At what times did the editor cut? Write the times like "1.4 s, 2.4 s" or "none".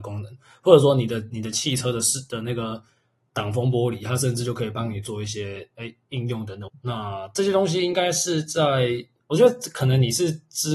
6.7 s